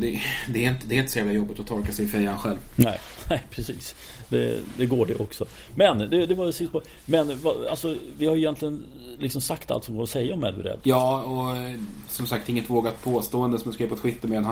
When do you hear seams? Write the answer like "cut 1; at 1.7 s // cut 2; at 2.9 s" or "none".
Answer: cut 1; at 10.8 s